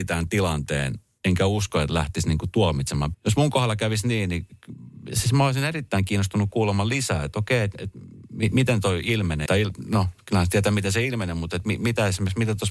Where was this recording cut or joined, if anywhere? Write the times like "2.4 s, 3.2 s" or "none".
3.1 s, 9.5 s